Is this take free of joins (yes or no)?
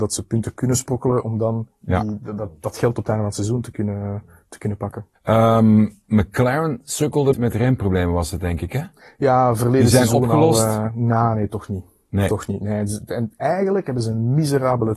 no